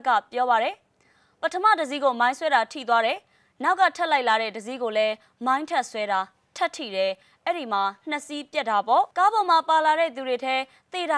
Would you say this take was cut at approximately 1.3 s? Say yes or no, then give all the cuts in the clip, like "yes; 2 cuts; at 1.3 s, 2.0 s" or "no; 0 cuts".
no; 1 cut; at 9.1 s